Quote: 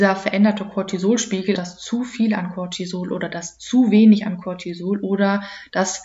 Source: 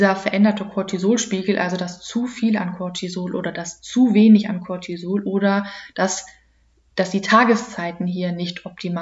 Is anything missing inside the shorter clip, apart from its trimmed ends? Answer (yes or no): yes